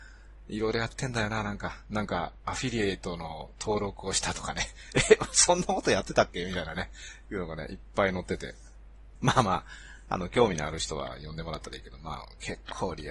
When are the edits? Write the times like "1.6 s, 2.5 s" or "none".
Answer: 9.2 s